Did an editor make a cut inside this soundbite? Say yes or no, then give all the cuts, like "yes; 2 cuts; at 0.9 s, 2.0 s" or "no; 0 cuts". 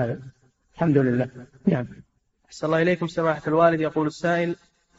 no; 0 cuts